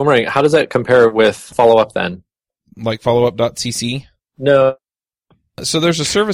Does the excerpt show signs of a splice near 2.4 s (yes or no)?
no